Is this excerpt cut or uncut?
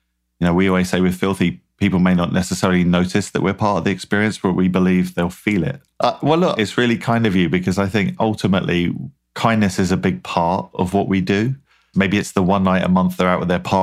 cut